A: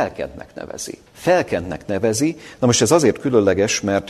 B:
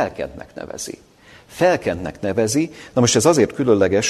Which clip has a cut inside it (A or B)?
A